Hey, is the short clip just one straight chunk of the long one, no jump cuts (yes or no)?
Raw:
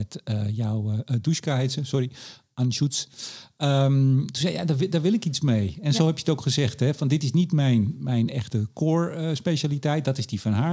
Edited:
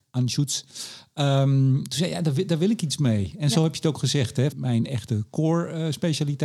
no